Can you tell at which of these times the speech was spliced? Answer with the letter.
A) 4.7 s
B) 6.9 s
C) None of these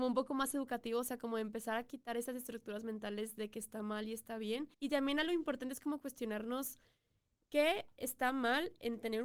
A